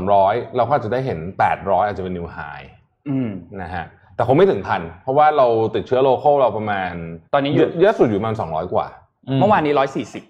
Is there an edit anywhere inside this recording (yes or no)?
yes